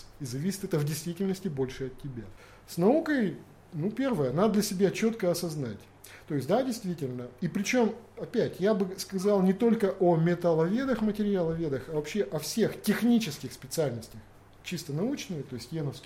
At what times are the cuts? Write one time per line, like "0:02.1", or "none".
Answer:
none